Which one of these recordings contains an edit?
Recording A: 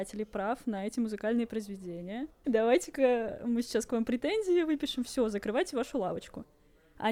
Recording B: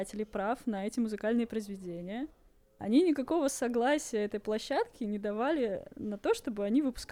A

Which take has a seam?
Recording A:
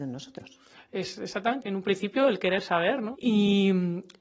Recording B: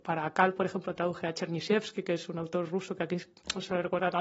A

